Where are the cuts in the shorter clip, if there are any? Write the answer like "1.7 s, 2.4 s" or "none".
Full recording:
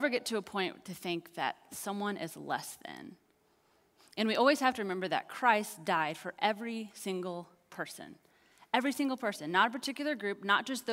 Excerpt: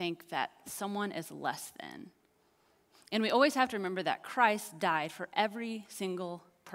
none